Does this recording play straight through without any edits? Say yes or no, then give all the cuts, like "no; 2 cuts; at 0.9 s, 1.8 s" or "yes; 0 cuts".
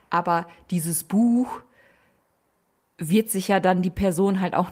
yes; 0 cuts